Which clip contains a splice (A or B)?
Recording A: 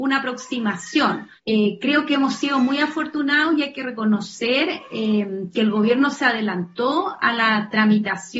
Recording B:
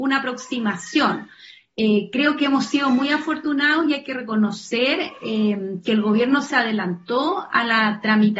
A